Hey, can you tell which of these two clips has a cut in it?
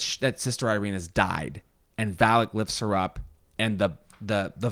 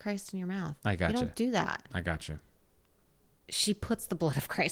second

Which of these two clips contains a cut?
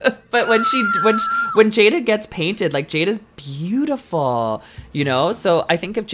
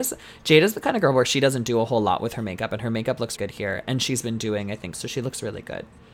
second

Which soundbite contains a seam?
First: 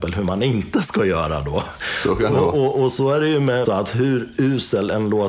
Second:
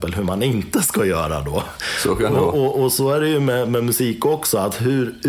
first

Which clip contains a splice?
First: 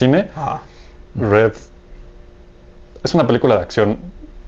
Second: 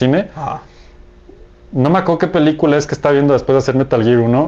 first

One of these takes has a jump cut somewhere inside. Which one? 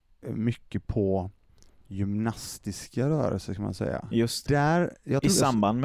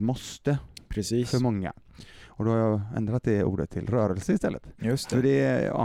first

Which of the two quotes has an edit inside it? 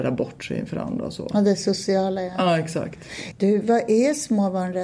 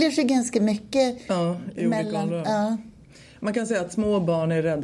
first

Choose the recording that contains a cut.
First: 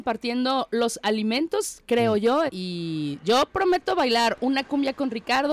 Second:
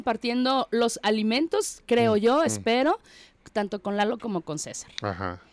first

